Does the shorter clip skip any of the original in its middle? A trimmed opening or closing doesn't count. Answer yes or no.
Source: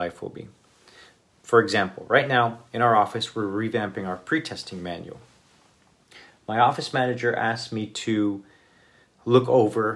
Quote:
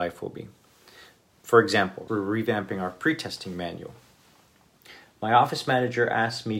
yes